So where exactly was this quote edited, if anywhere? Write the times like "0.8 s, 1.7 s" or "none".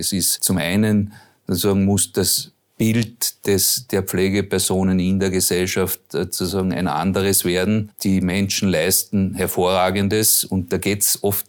none